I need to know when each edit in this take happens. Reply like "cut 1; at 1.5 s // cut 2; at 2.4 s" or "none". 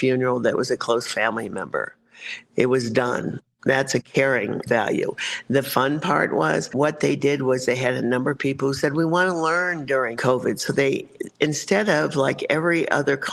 none